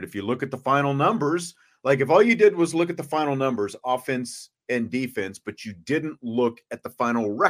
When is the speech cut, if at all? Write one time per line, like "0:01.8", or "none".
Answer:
none